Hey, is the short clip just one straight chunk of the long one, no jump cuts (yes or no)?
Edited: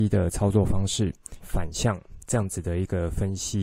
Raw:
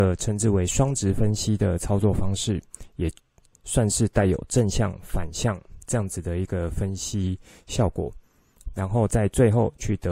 no